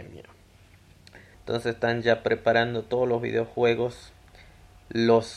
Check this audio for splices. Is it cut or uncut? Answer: cut